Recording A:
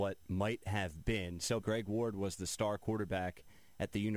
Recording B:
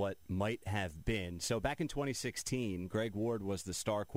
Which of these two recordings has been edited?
A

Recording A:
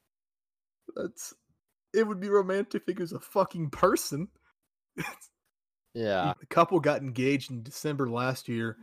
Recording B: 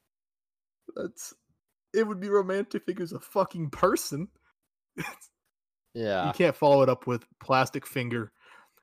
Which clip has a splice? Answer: A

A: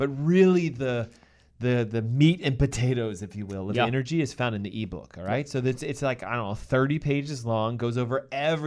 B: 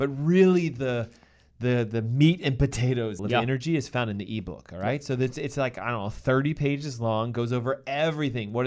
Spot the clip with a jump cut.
B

